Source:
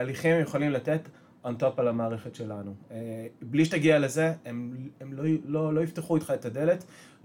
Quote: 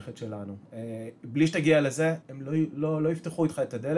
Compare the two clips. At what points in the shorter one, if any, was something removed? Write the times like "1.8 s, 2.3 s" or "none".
2.2 s